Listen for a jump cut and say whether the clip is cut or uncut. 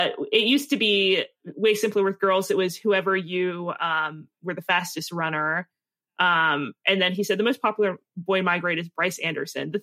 uncut